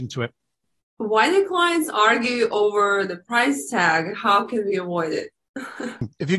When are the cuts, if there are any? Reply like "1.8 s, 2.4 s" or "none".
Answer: none